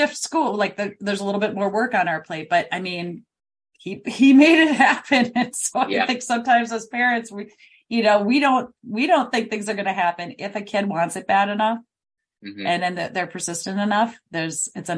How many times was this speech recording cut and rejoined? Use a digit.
0